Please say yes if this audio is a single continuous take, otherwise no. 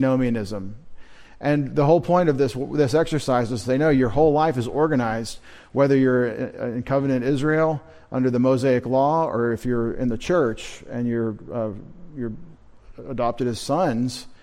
yes